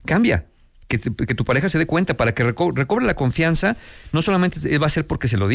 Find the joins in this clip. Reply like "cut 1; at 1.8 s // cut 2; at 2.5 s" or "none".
none

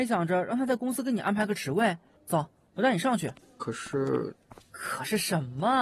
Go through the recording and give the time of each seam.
cut 1; at 2.2 s

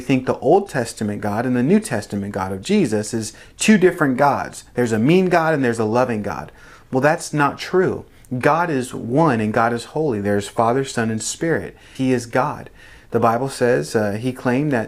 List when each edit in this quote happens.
cut 1; at 11.9 s

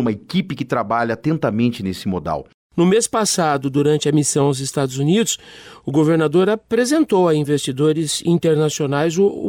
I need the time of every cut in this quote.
none

